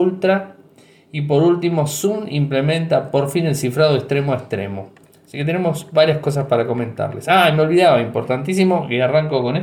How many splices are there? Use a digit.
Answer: 0